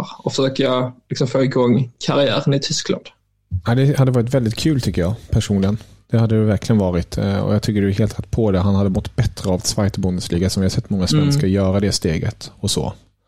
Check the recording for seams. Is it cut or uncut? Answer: uncut